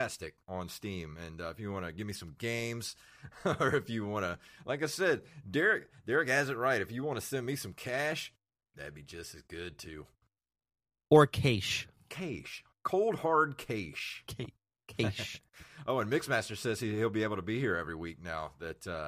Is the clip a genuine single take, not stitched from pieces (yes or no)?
yes